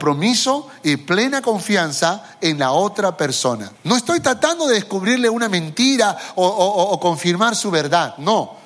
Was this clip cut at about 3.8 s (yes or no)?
yes